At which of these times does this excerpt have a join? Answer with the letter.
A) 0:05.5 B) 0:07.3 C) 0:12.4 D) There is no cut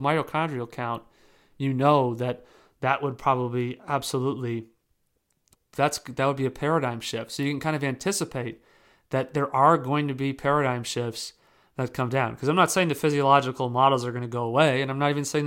A